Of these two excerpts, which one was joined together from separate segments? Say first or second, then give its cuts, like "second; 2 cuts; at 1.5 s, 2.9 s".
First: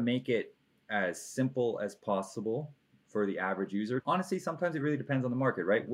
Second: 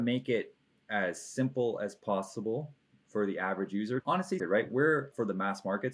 second; 1 cut; at 4.4 s